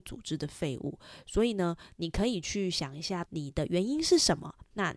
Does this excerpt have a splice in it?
yes; 1 cut; at 3.2 s

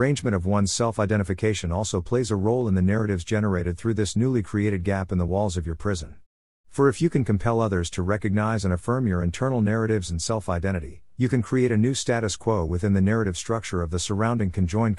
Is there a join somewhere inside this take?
no; 0 cuts

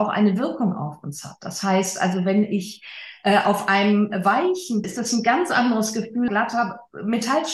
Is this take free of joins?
no; 2 cuts; at 4.8 s, 6.3 s

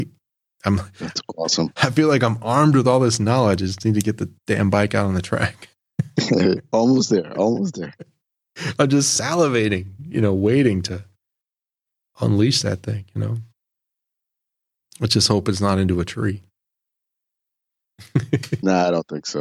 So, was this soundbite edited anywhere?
no; 0 cuts

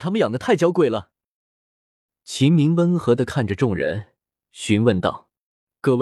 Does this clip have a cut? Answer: yes; 1 cut; at 2.1 s

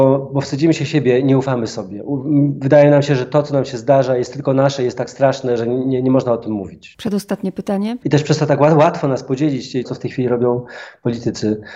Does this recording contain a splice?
yes; 2 cuts; at 8.0 s, 9.8 s

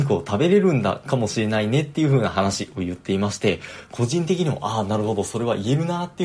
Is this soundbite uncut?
yes; 0 cuts

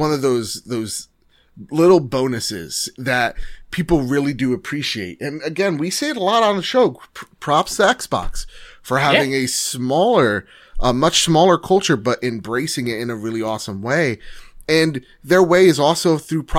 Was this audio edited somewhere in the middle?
no; 0 cuts

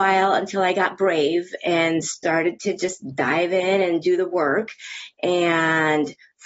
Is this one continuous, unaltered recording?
yes; 0 cuts

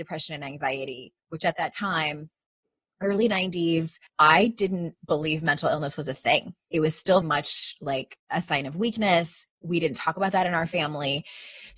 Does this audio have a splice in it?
yes; 2 cuts; at 4.1 s, 7.2 s

